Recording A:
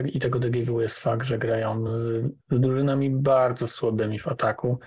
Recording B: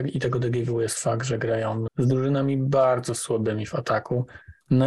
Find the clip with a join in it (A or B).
B